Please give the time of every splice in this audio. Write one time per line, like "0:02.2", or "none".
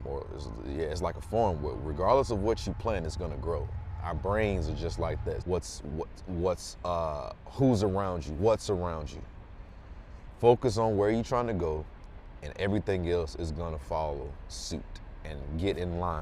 0:05.4